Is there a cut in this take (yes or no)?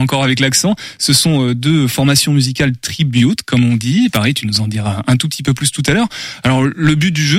no